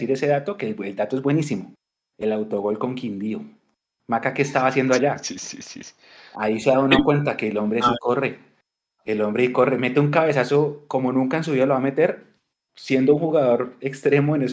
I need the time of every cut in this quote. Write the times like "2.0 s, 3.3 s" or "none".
4.0 s